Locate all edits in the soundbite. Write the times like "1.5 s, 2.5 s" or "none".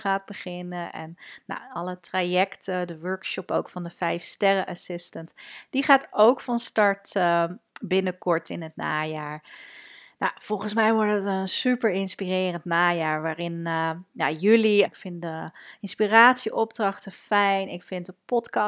14.9 s